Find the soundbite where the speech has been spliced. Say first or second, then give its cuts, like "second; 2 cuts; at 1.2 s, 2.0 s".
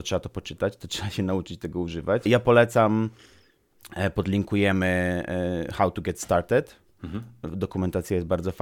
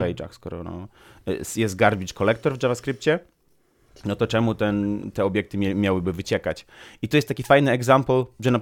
first; 1 cut; at 2.3 s